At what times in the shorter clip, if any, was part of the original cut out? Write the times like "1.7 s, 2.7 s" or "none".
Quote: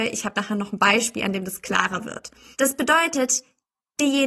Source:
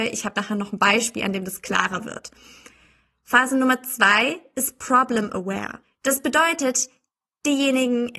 2.5 s